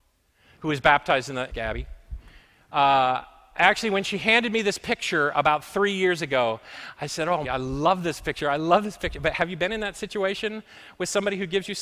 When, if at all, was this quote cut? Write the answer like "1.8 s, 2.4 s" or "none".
1.5 s, 7.4 s